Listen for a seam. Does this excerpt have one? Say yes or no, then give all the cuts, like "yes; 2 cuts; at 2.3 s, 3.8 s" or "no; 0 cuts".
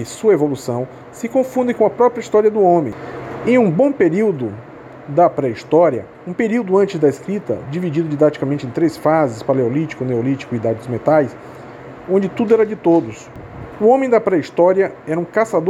yes; 2 cuts; at 6.1 s, 12.0 s